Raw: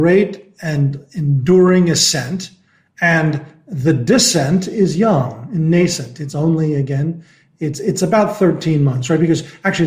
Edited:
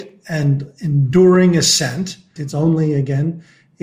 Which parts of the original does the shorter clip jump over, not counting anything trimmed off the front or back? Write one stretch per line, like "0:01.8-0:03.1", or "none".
0:02.7-0:06.2

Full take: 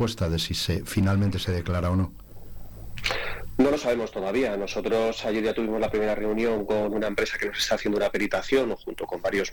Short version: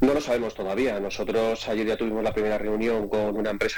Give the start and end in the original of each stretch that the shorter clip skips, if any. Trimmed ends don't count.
none

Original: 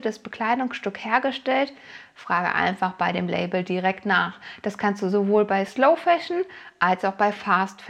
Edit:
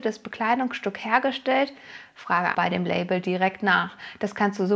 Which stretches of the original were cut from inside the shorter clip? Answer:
0:02.5-0:03.0

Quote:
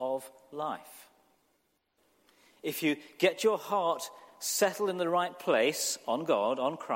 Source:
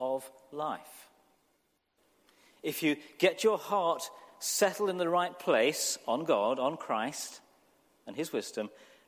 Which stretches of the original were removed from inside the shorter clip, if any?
none

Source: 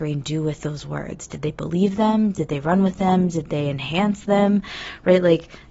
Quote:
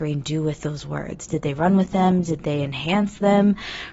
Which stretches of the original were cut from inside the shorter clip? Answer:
0:01.3-0:02.3

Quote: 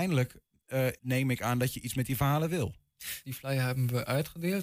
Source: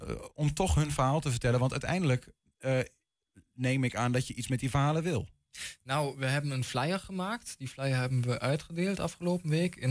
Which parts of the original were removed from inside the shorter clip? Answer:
0:02.9-0:03.5
0:05.8-0:07.6

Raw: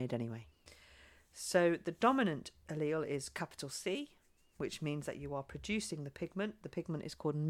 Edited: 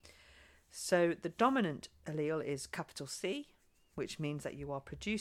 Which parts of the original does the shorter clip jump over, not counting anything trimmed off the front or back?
none

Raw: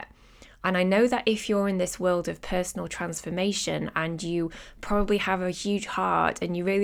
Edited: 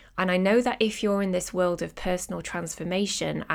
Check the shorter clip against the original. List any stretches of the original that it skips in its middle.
none

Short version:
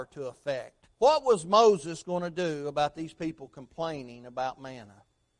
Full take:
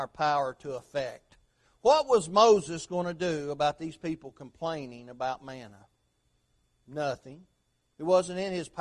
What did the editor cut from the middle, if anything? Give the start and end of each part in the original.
0:01.4-0:01.8

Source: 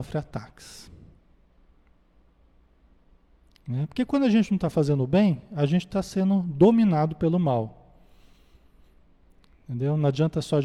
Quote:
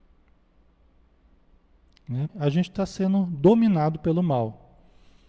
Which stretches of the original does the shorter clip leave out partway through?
0:03.9-0:05.5

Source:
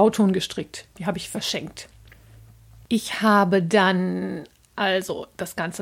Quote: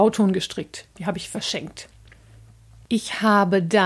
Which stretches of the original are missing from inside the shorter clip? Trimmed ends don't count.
none

